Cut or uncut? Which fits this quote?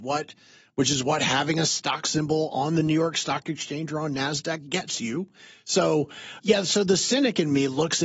cut